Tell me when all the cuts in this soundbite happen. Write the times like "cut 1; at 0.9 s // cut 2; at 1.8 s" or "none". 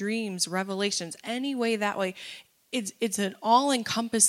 none

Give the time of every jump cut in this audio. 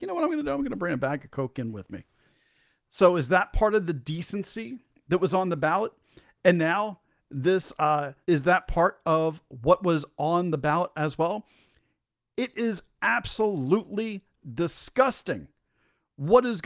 cut 1; at 8.2 s

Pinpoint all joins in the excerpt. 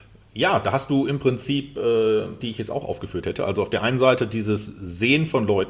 cut 1; at 2.4 s

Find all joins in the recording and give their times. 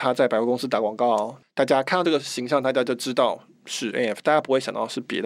cut 1; at 1.4 s

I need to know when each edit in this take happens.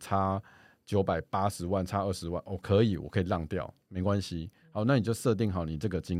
none

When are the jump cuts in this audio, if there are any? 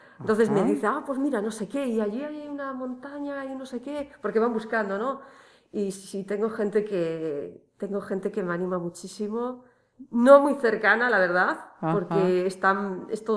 none

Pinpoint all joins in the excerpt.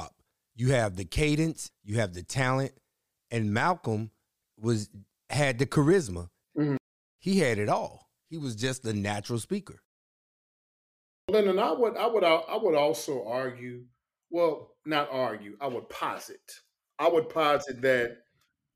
cut 1; at 1.7 s

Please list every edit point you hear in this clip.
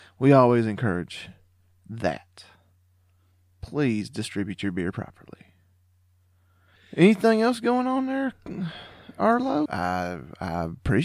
cut 1; at 9.7 s

